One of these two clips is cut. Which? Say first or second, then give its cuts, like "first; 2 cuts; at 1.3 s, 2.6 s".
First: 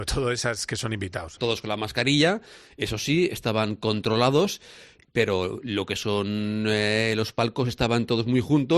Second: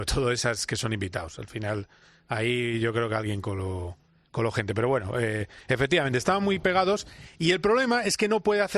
first; 1 cut; at 1.4 s